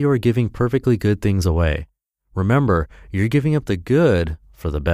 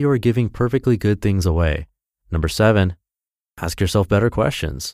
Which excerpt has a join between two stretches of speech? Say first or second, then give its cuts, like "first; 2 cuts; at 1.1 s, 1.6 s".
second; 1 cut; at 2.2 s